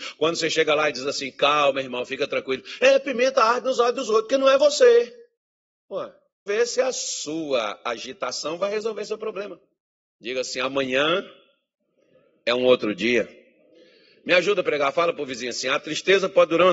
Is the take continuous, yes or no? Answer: no